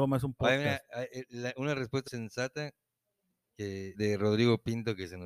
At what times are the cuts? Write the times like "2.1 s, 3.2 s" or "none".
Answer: 2.1 s, 3.9 s